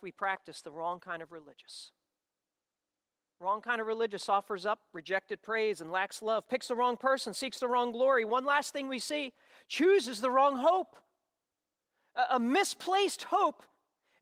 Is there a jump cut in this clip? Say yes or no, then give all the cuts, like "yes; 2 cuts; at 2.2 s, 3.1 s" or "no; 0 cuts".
no; 0 cuts